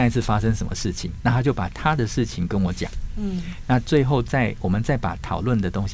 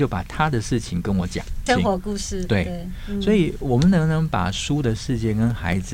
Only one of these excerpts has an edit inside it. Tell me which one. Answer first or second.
second